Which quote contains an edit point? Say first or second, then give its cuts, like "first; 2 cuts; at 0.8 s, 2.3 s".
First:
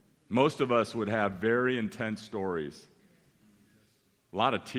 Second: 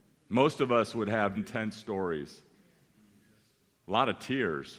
second; 1 cut; at 1.3 s